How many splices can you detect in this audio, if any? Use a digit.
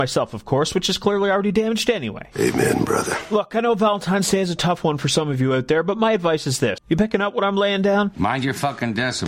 1